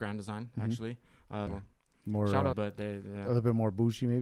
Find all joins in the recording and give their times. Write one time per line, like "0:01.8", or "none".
0:01.5
0:02.5